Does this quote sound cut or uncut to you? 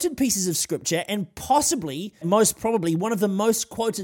cut